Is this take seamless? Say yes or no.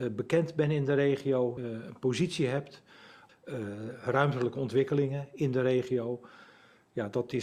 no